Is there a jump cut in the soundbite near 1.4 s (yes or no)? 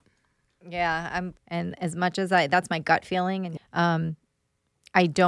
yes